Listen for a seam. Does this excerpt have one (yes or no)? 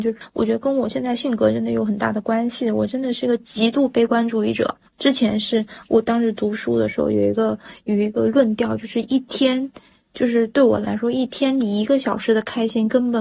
yes